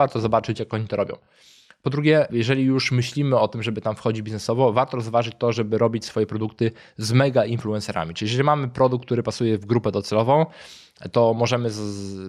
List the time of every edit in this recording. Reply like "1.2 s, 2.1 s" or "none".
none